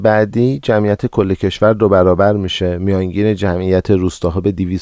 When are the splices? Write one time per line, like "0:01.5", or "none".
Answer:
none